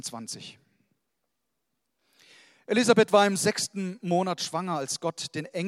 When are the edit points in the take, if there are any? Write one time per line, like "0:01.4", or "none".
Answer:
none